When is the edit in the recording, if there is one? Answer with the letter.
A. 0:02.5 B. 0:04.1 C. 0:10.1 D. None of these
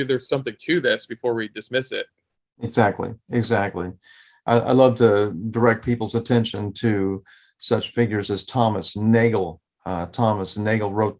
D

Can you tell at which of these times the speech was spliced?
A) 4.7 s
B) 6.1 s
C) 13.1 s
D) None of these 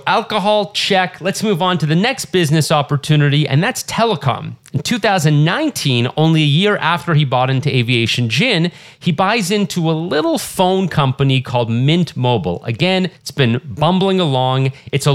C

